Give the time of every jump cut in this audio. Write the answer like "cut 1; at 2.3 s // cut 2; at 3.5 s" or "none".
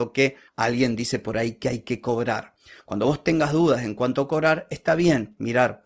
none